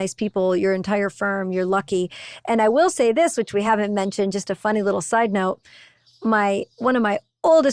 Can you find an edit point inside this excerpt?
no; 0 cuts

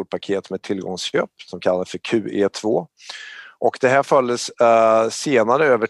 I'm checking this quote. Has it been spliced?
no; 0 cuts

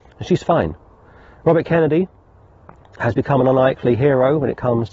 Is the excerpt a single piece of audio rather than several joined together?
yes; 0 cuts

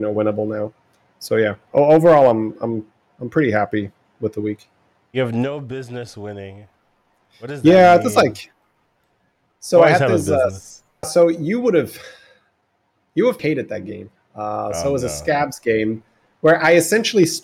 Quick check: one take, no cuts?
no; 2 cuts; at 11.0 s, 13.4 s

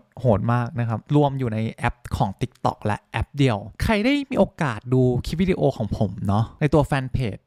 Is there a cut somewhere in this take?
yes; 1 cut; at 1.1 s

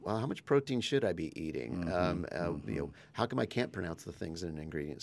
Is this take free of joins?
yes; 0 cuts

